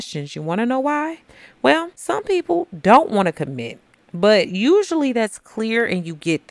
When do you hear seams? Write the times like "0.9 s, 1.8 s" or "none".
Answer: 1.9 s